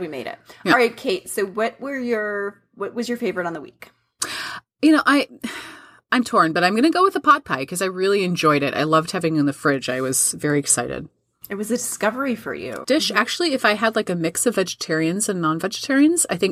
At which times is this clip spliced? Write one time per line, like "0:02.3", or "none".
0:12.8